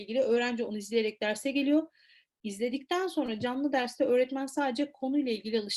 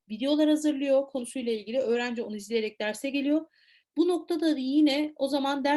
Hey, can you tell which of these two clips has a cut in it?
second; 1 cut; at 3.8 s

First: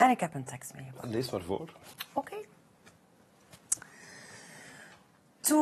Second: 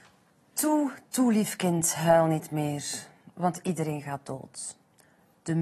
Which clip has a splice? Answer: second; 1 cut; at 1.0 s

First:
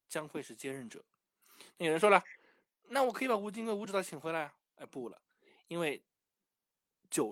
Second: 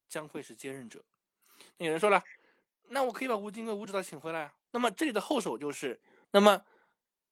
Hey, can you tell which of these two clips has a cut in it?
second; 2 cuts; at 4.7 s, 6.2 s

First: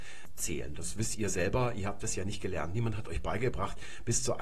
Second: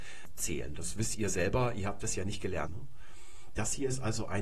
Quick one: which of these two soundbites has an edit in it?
second; 1 cut; at 2.7 s

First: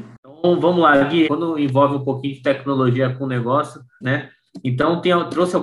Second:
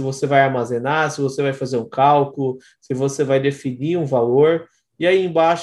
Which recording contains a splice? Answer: first; 2 cuts; at 1.3 s, 4.0 s

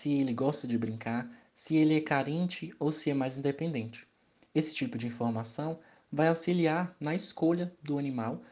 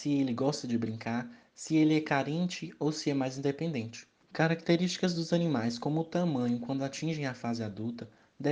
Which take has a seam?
second; 1 cut; at 4.2 s

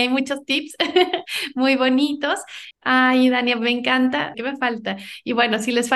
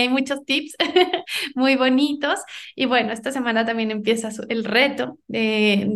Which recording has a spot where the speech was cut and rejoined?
first; 2 cuts; at 2.7 s, 4.3 s

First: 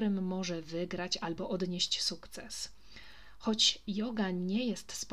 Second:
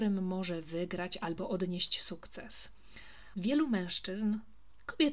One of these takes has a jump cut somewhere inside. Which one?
second; 1 cut; at 3.3 s

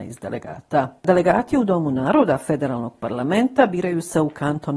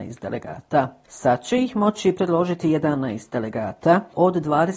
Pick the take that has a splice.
first; 1 cut; at 1.0 s

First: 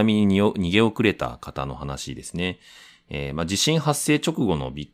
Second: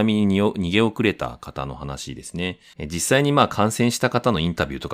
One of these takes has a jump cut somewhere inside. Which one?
second; 1 cut; at 2.7 s

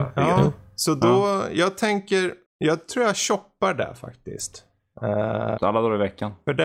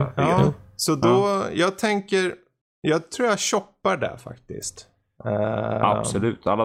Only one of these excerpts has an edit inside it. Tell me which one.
first; 2 cuts; at 2.4 s, 5.6 s

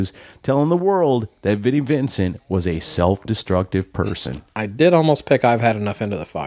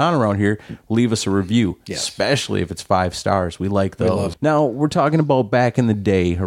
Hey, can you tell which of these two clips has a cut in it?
second; 1 cut; at 4.3 s

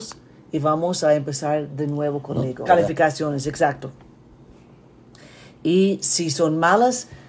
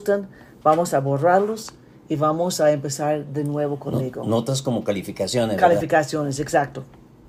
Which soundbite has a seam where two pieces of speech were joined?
first; 1 cut; at 2.7 s

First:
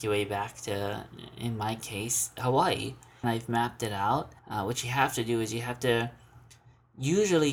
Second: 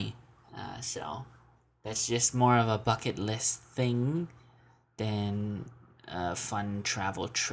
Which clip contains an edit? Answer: first; 2 cuts; at 3.2 s, 4.4 s

